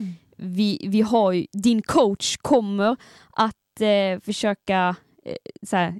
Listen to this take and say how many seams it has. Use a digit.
0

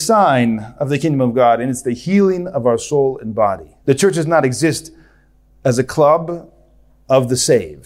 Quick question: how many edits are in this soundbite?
1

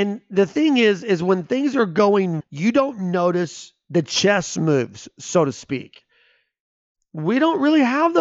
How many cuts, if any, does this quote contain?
2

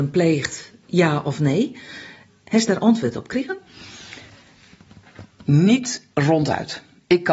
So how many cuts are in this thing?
1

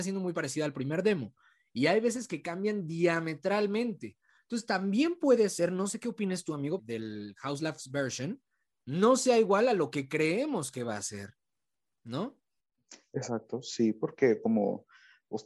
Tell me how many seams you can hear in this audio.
1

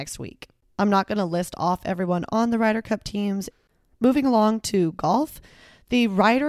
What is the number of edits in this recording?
1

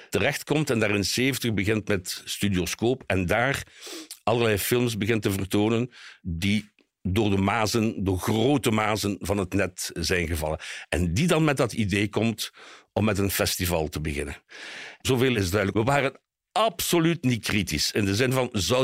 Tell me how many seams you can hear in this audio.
1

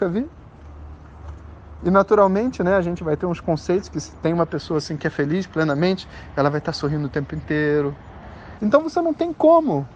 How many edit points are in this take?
1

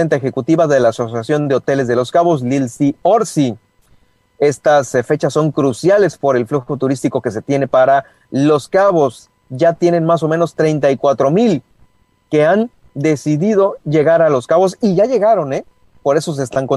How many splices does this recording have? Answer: 0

